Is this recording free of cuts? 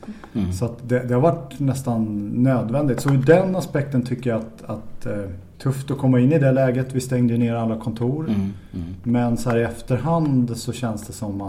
no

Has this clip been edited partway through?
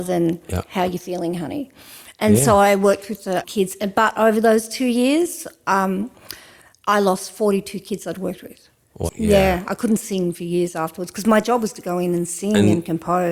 yes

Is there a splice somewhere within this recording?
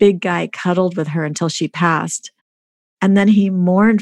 no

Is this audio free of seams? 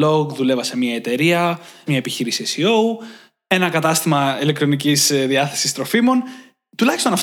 no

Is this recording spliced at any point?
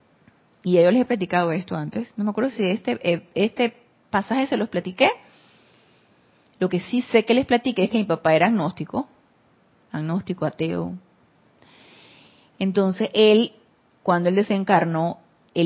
no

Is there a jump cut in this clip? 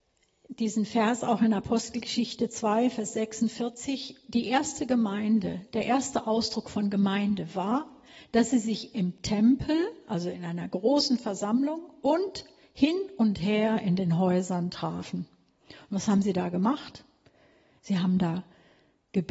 no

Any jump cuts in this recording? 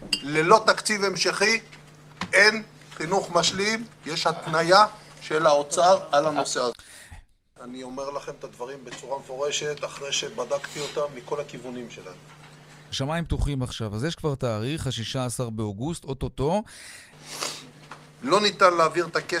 yes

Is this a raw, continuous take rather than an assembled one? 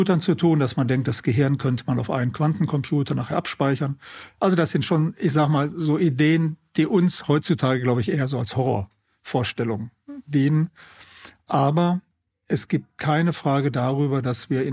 yes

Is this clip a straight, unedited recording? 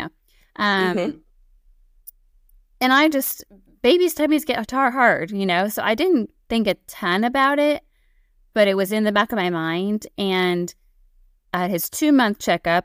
yes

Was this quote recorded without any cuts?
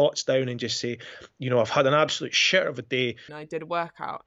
no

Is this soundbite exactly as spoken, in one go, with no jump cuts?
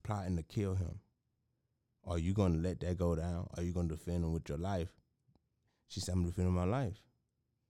yes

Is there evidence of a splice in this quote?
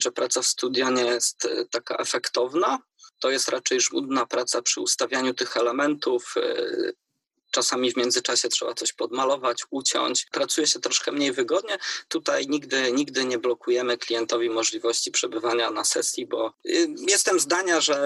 yes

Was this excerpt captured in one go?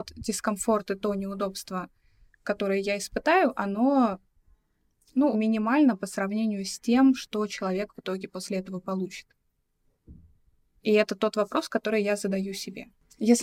no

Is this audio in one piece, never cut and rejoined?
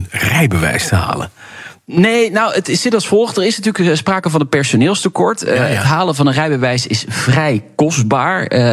no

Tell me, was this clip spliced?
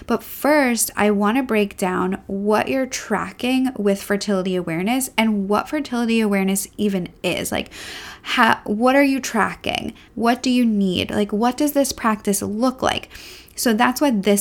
yes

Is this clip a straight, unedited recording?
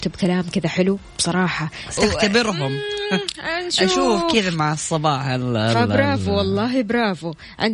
no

